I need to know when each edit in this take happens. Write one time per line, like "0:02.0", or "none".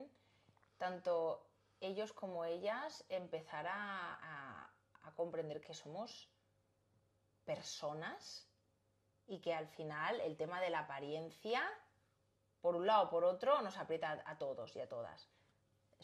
0:05.6